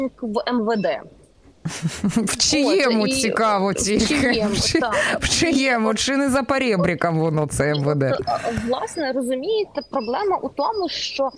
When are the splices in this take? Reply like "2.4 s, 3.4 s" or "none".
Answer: none